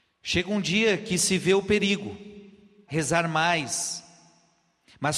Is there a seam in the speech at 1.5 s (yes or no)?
no